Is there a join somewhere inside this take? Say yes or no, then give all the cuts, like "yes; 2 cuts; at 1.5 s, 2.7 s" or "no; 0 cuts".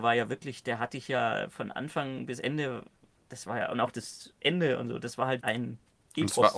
yes; 1 cut; at 5.4 s